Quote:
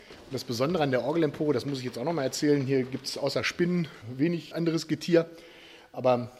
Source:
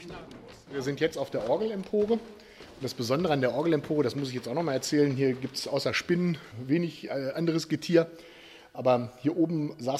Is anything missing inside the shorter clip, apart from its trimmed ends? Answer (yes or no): yes